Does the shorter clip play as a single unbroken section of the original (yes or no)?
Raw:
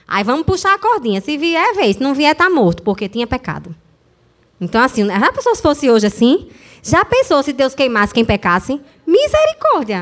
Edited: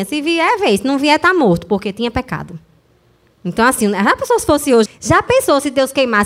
no